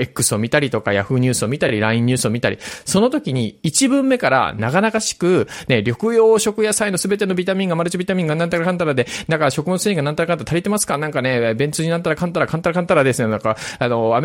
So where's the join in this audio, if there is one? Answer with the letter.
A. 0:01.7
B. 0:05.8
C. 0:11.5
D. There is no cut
D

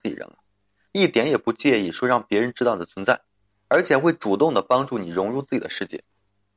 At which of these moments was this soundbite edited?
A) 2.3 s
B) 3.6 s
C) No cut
C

